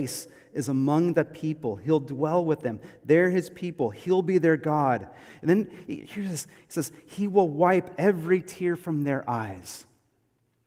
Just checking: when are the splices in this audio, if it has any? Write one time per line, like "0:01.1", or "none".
none